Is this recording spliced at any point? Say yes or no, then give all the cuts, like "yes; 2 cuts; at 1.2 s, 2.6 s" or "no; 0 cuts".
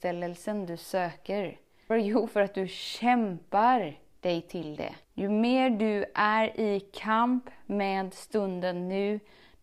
yes; 2 cuts; at 1.9 s, 5.0 s